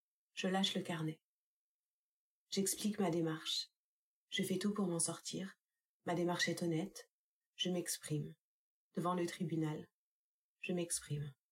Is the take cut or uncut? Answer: uncut